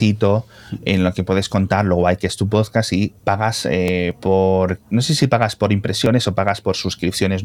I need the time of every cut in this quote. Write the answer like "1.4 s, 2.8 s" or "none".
3.2 s